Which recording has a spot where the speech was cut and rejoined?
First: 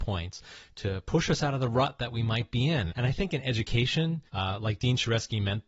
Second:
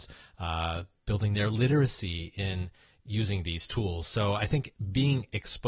first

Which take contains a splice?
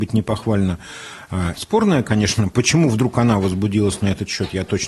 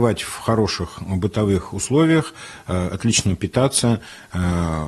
first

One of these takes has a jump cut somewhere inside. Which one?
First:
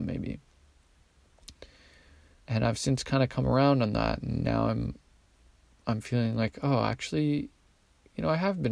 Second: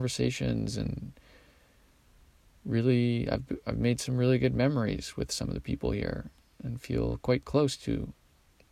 first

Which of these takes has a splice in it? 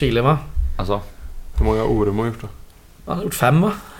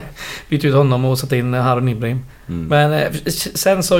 first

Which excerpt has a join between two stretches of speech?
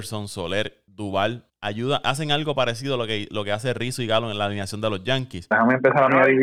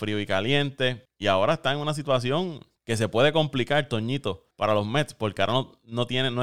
first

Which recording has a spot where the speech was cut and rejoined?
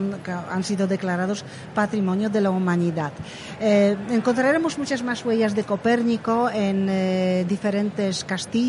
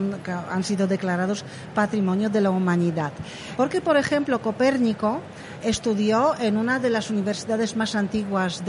second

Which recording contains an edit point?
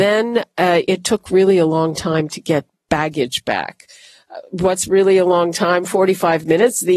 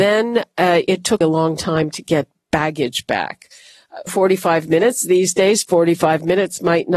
second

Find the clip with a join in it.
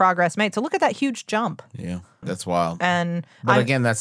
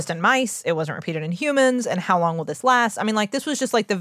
first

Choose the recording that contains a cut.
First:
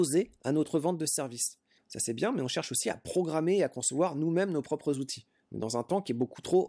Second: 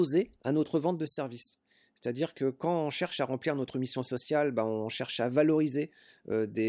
first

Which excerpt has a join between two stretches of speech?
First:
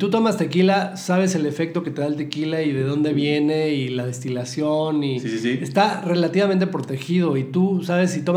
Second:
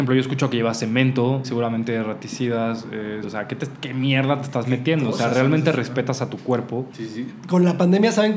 second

